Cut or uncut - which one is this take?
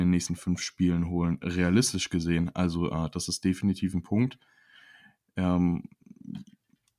uncut